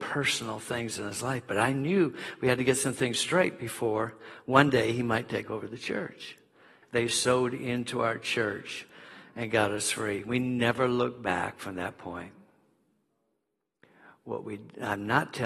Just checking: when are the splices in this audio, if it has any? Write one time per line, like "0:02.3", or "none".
0:06.8